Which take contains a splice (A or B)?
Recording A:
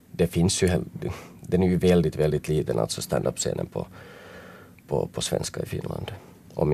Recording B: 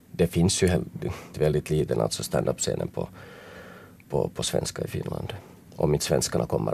B